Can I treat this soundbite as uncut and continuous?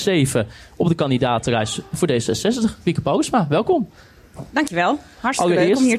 yes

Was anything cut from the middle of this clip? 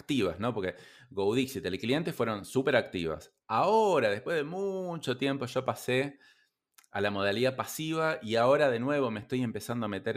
no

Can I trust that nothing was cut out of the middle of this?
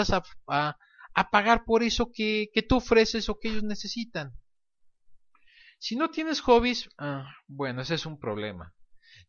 yes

